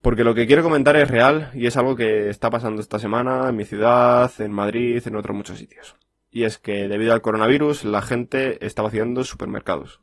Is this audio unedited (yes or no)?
yes